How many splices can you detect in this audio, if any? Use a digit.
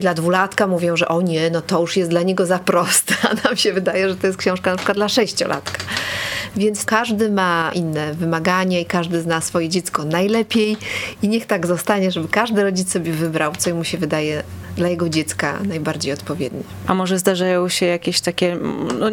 0